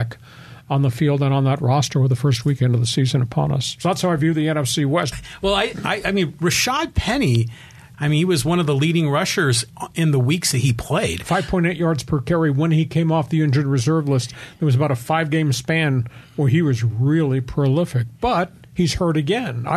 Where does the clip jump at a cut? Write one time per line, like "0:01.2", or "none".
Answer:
0:05.1
0:07.9

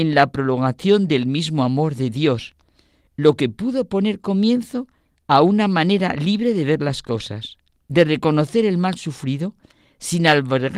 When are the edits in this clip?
0:07.8

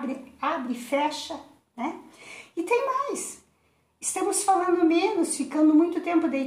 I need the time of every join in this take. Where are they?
none

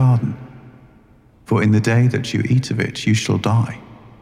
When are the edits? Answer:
0:01.3

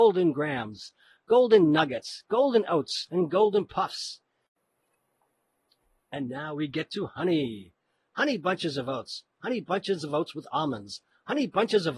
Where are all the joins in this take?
none

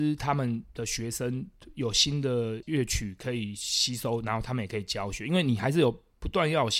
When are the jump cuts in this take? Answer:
0:02.6

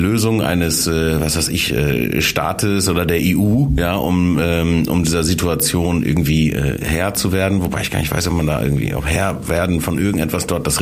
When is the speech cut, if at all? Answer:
none

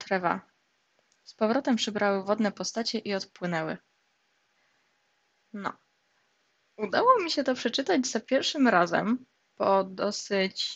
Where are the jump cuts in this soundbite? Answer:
none

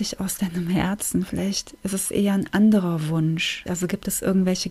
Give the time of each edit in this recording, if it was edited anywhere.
0:03.7

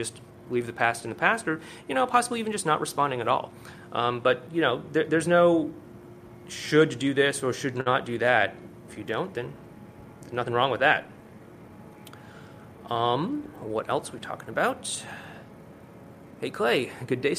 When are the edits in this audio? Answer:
0:08.9

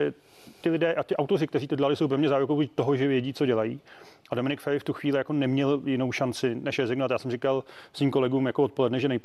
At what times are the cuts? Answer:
none

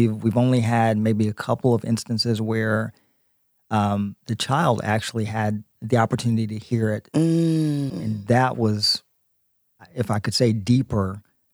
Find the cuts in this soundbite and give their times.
0:07.9
0:09.8

